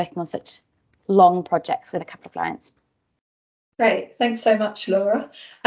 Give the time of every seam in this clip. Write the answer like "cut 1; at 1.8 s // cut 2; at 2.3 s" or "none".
none